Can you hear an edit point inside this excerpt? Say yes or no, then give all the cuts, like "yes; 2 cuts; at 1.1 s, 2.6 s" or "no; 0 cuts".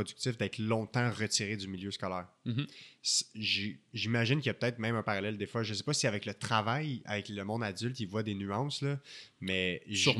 no; 0 cuts